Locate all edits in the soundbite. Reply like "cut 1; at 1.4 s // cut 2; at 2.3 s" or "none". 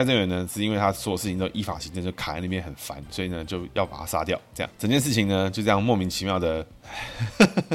none